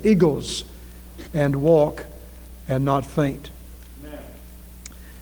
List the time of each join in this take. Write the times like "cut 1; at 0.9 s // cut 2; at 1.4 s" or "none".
cut 1; at 1.2 s